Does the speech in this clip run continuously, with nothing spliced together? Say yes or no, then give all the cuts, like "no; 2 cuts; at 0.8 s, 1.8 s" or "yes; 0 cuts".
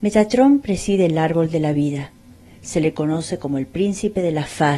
yes; 0 cuts